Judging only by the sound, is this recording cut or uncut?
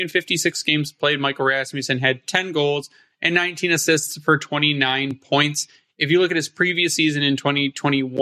uncut